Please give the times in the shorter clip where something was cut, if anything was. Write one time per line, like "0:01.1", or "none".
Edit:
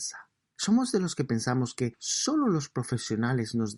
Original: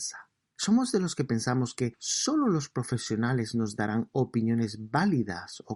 none